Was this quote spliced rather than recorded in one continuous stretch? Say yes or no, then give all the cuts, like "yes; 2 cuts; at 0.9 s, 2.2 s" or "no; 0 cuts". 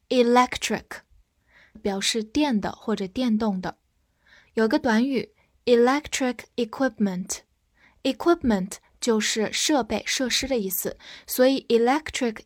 yes; 1 cut; at 1.8 s